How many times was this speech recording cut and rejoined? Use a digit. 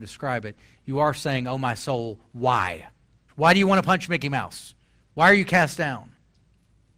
1